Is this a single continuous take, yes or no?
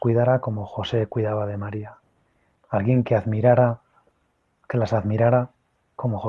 no